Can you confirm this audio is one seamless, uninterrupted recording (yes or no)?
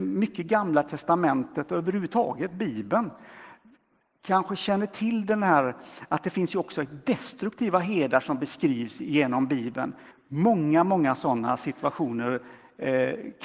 no